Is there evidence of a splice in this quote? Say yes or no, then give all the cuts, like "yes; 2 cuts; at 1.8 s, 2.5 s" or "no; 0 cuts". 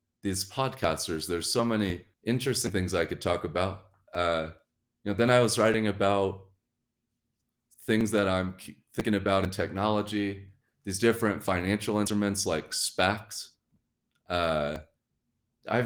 yes; 1 cut; at 2.1 s